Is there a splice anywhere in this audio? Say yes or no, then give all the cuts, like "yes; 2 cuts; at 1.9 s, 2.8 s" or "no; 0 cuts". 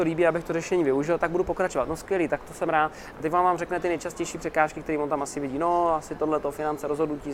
yes; 1 cut; at 3.1 s